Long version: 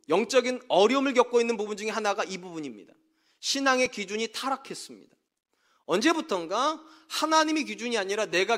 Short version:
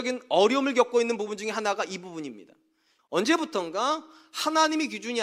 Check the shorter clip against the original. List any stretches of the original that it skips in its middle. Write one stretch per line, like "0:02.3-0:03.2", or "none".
0:03.4-0:05.8